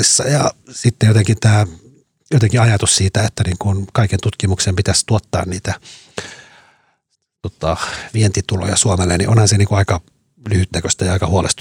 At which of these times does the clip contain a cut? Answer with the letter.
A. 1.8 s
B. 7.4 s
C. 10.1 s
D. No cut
D